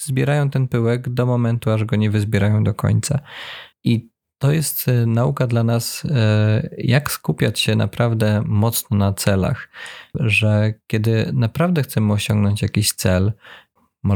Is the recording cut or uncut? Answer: uncut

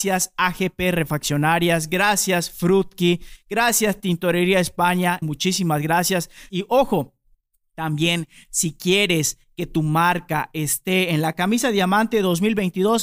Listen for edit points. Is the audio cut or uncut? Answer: cut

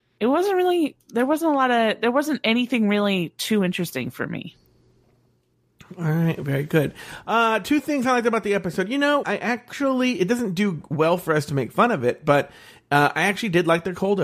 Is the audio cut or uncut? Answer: cut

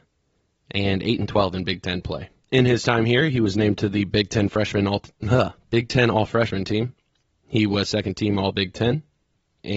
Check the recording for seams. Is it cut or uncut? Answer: uncut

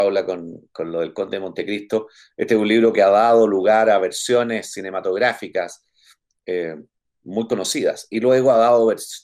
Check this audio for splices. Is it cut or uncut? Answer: uncut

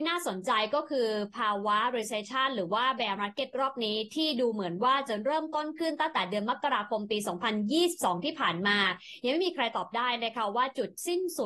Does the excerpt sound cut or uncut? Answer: uncut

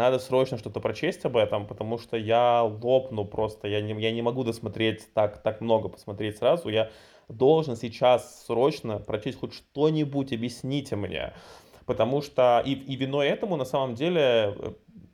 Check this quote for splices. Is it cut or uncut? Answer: uncut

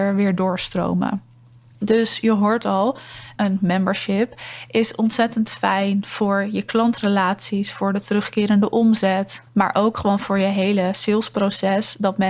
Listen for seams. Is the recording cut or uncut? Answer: cut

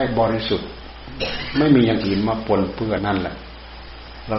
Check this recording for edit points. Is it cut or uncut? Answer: cut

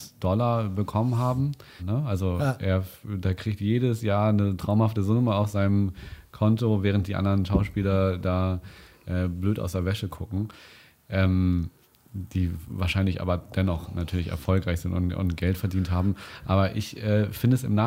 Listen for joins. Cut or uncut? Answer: cut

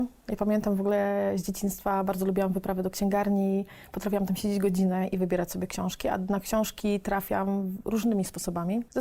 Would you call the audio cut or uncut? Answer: uncut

